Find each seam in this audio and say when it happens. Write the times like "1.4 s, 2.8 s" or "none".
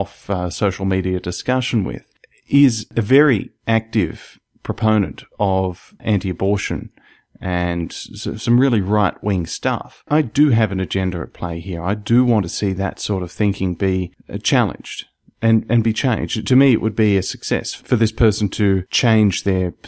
none

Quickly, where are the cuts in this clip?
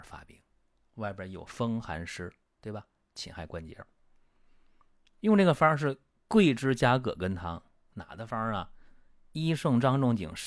none

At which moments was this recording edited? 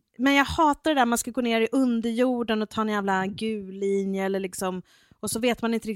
none

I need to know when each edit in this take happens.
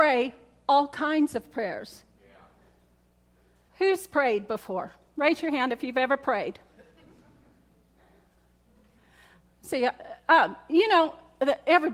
3.7 s

